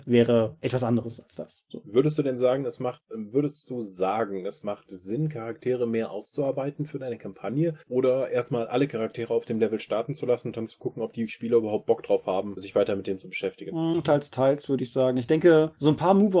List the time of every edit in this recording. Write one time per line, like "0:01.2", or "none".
none